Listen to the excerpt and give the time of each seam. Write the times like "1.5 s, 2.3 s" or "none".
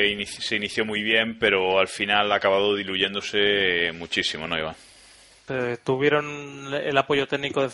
5.5 s